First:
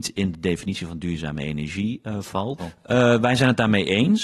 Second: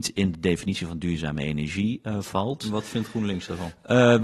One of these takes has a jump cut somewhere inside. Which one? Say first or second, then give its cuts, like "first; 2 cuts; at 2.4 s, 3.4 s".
first; 1 cut; at 2.6 s